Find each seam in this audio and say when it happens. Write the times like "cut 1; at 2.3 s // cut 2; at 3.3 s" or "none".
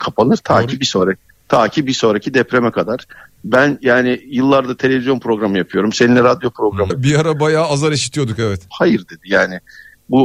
cut 1; at 6.9 s // cut 2; at 8.7 s